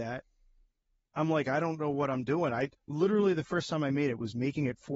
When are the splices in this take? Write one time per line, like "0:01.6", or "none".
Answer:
0:02.8